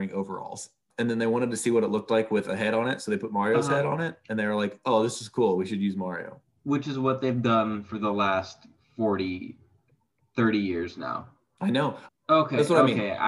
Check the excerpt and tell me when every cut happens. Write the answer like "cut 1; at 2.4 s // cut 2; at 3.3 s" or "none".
cut 1; at 12.1 s